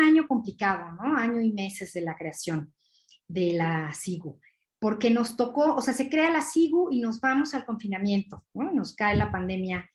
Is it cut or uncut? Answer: uncut